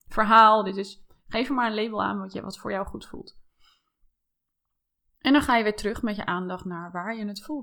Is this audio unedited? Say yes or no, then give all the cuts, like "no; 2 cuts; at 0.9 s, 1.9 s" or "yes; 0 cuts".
yes; 0 cuts